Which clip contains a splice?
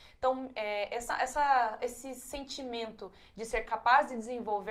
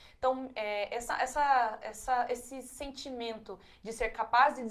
first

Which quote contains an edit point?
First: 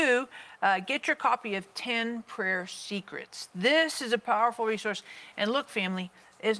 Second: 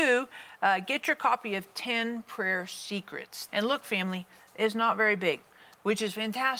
second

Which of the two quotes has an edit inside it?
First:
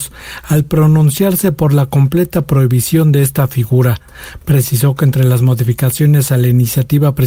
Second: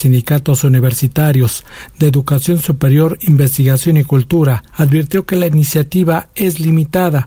second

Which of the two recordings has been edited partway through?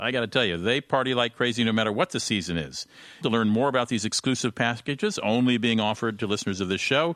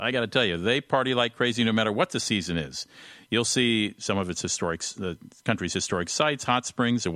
first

